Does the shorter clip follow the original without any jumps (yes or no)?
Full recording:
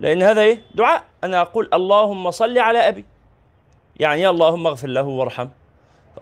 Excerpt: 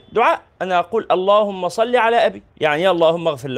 no